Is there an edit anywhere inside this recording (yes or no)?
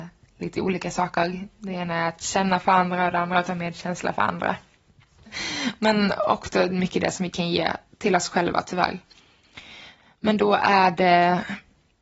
yes